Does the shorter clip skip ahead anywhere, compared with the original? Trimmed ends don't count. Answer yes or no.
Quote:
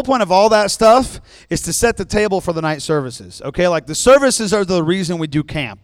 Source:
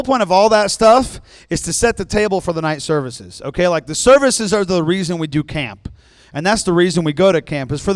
no